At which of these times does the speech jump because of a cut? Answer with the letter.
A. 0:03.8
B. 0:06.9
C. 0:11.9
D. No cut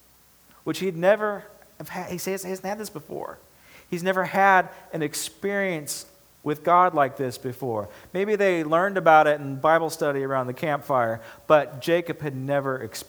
D